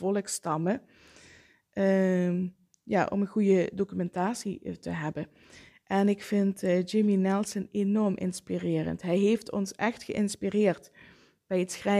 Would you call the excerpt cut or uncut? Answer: uncut